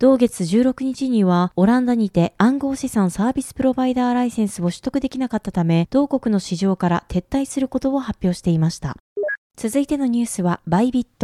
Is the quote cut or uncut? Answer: uncut